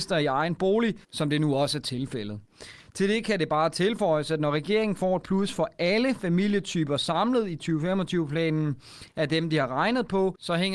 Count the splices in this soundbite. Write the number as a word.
one